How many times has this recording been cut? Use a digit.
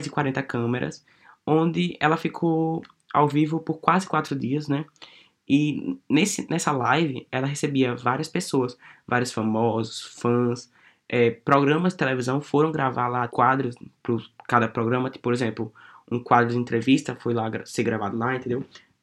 1